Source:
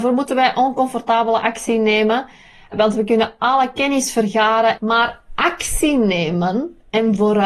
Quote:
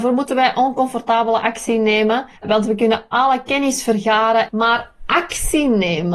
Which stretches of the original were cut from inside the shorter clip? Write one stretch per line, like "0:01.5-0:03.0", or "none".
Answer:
0:02.4-0:02.6